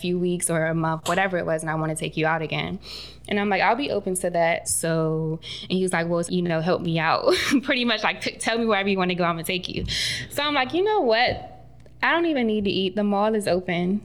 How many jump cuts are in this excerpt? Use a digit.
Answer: 2